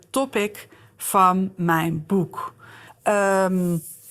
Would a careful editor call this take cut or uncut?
cut